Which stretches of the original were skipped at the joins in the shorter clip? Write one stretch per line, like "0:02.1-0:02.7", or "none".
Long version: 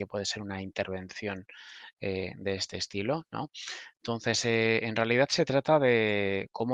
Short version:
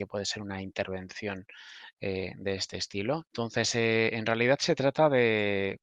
0:03.2-0:03.9

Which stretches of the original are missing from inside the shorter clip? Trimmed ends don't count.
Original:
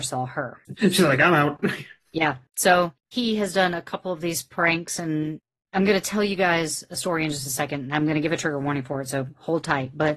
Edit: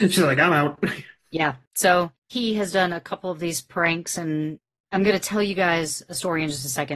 none

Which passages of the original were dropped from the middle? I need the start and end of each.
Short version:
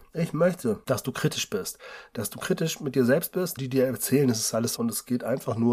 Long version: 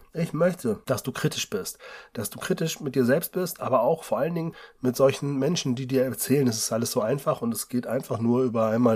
0:03.6-0:05.8
0:06.9-0:07.4

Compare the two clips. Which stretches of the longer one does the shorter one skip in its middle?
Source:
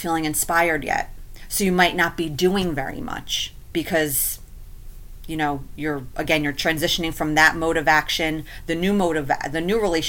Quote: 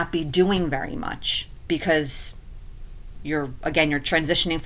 0:05.2-0:05.7

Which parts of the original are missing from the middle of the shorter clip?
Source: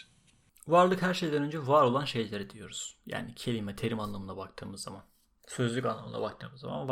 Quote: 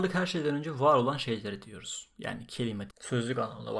0:03.7-0:05.3

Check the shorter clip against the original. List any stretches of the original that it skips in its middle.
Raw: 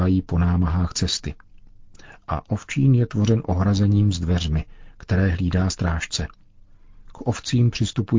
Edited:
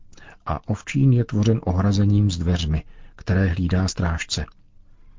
none

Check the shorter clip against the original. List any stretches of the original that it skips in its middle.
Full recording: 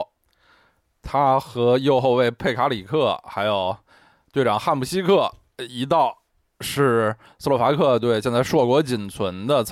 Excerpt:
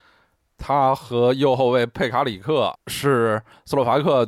0:03.2-0:06.5

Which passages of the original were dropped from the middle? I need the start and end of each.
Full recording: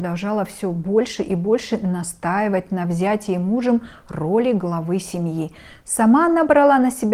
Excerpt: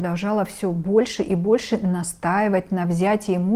none

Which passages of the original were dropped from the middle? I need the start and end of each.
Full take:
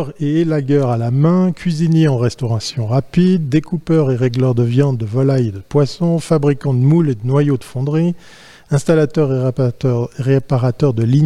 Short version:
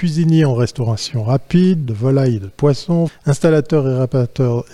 0:03.5-0:05.0
0:06.2-0:08.5

